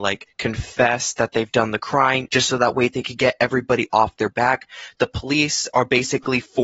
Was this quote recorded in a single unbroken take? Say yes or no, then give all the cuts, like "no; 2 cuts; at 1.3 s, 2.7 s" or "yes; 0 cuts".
no; 1 cut; at 2.3 s